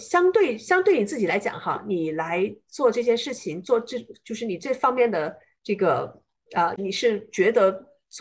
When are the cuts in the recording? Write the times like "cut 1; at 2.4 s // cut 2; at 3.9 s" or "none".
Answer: cut 1; at 6.8 s